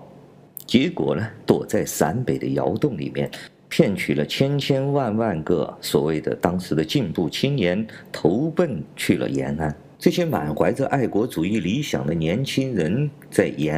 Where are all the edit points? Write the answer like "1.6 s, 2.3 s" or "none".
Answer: none